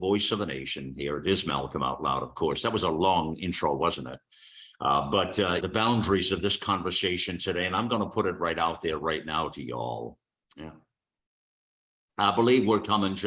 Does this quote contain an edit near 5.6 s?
yes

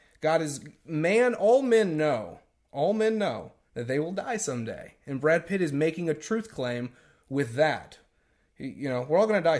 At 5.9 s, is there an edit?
no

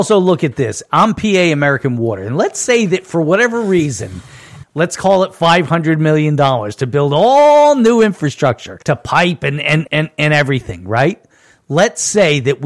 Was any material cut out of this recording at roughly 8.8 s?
yes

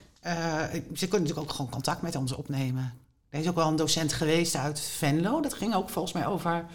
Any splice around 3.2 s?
no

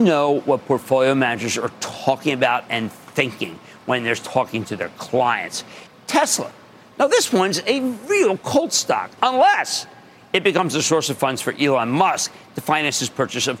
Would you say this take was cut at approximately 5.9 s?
yes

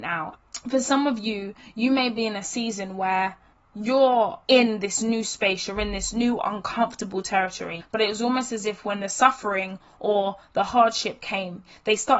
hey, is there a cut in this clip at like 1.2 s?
no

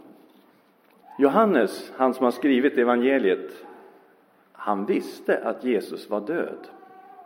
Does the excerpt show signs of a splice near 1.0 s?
yes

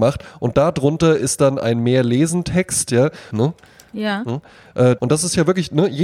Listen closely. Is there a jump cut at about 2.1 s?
no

